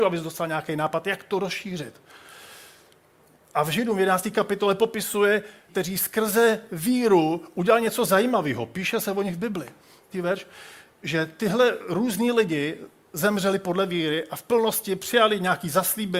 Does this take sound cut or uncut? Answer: cut